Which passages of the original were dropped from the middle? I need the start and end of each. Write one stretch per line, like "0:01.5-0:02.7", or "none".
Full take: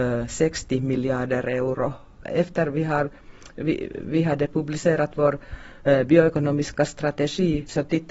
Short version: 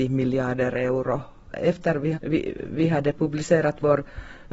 0:02.9-0:03.5